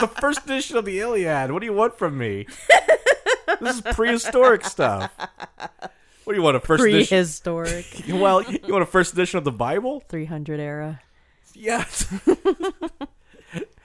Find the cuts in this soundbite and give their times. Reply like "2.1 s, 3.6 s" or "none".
8.4 s